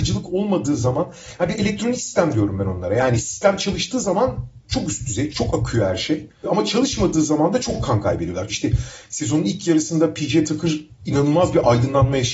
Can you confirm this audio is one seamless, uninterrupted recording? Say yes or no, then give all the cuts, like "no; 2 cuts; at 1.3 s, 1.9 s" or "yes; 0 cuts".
no; 2 cuts; at 5.3 s, 8.5 s